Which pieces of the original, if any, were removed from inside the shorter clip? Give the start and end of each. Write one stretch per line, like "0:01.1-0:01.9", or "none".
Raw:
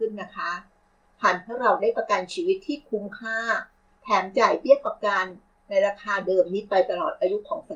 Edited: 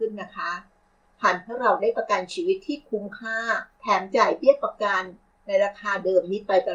0:03.7-0:04.0

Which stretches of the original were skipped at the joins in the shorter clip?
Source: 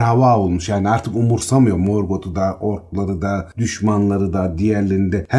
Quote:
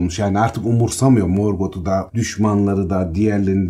0:02.6-0:03.5

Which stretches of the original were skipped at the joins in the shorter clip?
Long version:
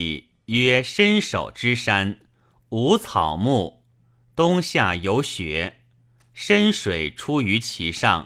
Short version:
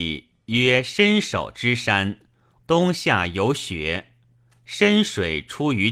0:02.6-0:04.3

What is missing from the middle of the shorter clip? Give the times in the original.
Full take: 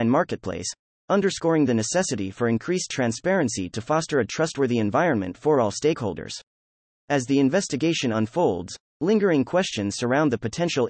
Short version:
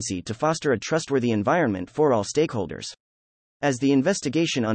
none

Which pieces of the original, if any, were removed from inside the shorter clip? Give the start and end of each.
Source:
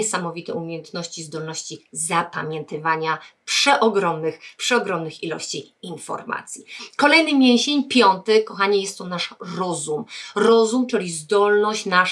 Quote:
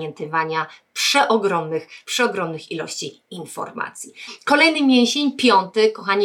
none

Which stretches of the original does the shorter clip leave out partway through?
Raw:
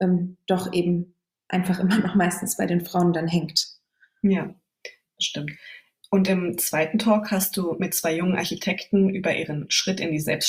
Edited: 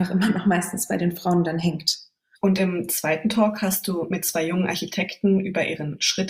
0:04.0-0:06.0

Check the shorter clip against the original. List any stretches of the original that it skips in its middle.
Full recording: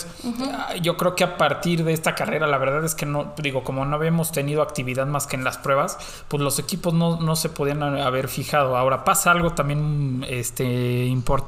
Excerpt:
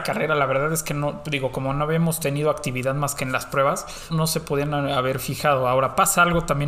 0:06.2-0:07.2

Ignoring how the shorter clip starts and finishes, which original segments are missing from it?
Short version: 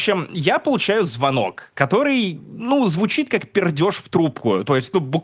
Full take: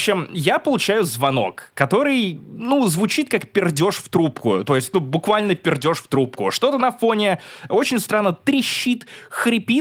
none

